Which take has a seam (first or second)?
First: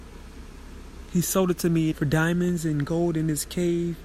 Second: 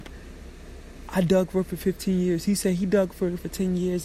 first